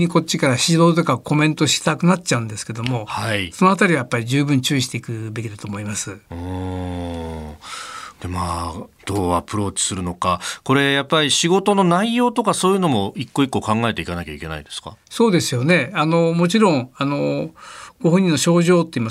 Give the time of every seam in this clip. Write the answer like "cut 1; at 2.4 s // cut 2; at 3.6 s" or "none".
none